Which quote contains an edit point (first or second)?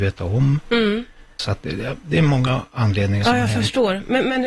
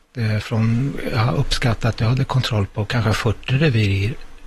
first